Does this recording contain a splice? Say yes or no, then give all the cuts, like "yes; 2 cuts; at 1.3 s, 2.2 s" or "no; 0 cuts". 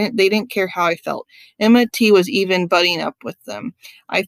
no; 0 cuts